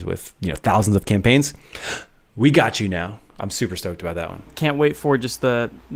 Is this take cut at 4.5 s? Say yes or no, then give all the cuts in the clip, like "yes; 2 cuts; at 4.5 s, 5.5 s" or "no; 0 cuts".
yes; 1 cut; at 4.5 s